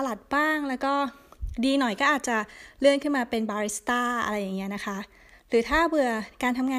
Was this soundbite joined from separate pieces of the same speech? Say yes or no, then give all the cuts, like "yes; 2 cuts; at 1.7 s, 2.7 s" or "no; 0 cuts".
no; 0 cuts